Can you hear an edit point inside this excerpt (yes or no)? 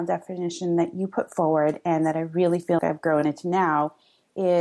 yes